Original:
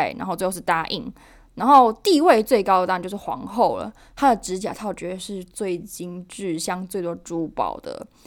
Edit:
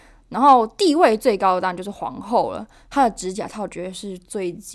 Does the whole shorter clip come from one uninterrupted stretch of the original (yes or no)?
yes